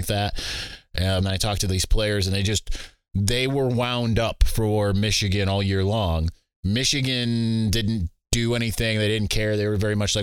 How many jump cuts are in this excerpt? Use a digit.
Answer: 1